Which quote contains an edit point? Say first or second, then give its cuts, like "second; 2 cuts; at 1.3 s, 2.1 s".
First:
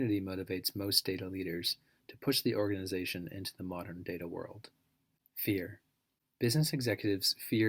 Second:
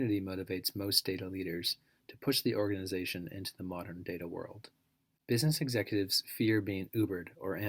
second; 1 cut; at 5.2 s